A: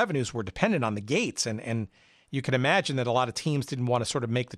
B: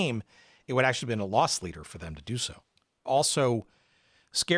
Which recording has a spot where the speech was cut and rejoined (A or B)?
B